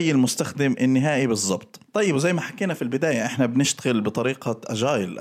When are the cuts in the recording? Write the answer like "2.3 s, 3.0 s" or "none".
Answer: 1.8 s